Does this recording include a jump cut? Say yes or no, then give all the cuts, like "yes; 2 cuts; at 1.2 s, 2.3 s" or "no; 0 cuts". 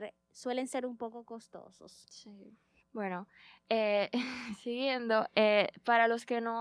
yes; 1 cut; at 2.8 s